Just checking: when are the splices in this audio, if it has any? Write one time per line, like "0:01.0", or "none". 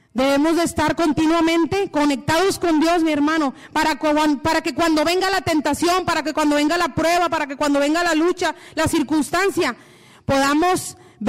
none